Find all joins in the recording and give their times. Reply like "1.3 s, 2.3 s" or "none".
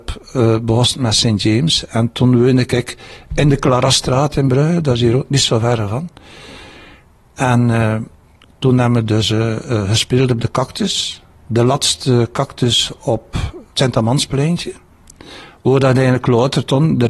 none